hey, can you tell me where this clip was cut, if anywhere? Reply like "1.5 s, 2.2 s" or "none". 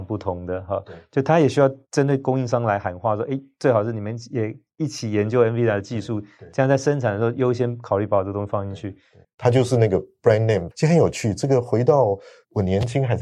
9.2 s, 10.7 s